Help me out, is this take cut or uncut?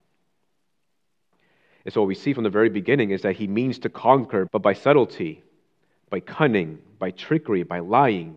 cut